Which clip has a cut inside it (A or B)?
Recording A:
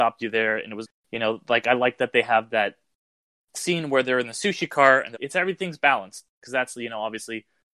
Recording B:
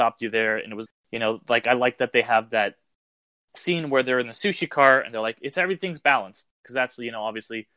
A